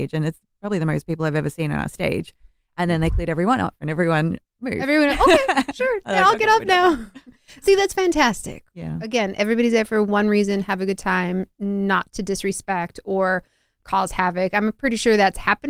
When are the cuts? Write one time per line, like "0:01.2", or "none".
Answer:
none